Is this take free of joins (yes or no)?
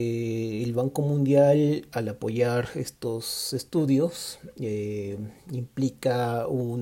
yes